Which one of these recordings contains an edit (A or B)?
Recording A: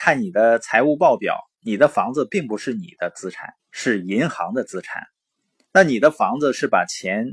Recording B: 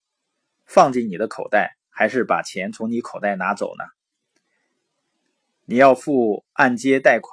A